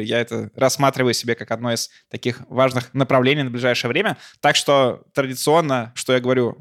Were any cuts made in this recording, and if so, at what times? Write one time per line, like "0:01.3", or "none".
none

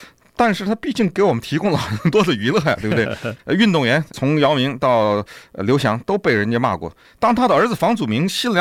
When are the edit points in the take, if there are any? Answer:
0:03.4
0:07.0

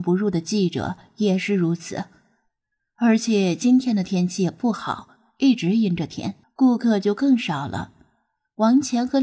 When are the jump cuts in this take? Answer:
0:06.4

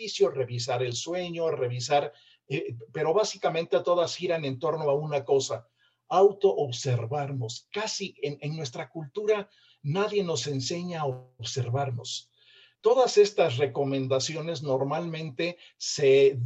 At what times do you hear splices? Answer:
0:12.8

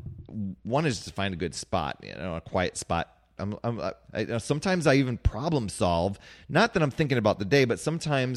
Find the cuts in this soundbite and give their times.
0:03.4

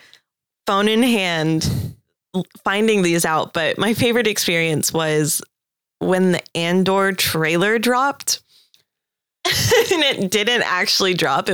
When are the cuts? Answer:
none

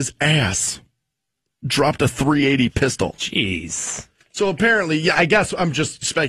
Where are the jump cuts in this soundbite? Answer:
0:05.1

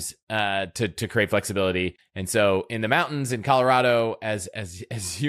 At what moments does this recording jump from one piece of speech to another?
0:02.0

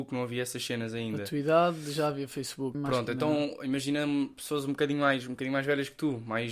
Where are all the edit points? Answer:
0:02.7

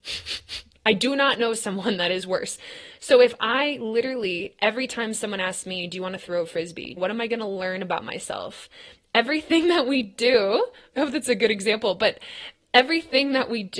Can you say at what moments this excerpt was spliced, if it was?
0:07.0

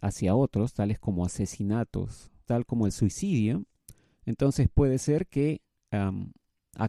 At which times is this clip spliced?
0:02.5

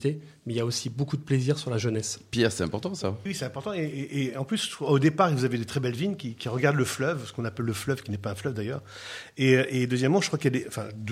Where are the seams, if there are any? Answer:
0:03.3

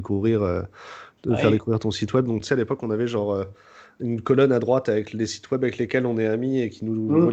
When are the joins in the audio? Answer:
none

